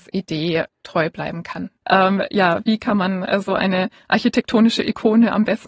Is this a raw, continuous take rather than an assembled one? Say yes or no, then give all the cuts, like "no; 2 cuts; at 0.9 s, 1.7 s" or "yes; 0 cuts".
no; 2 cuts; at 1.8 s, 3.4 s